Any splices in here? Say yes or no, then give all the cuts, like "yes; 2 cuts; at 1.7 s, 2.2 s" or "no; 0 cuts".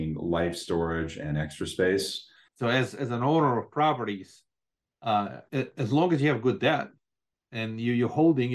yes; 2 cuts; at 2.5 s, 5.5 s